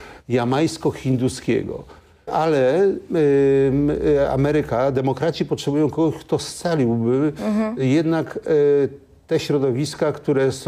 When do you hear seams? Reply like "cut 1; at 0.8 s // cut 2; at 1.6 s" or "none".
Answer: cut 1; at 2.3 s